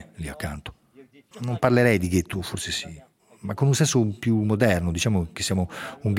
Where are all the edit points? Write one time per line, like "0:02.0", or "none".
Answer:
0:01.3